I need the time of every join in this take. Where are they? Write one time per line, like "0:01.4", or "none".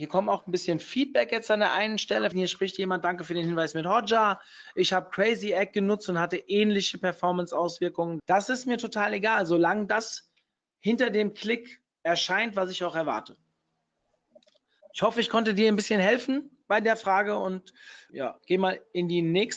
0:02.3
0:08.2
0:18.1

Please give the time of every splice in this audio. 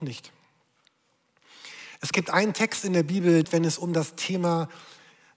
0:03.4

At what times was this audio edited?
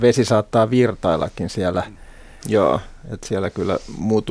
0:02.4

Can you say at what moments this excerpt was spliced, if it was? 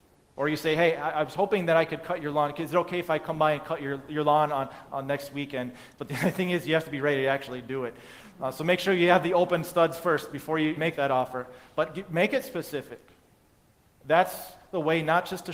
0:10.8

